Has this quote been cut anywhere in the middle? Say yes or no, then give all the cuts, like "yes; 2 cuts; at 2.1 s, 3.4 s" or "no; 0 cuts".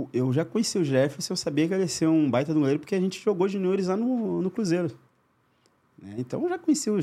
no; 0 cuts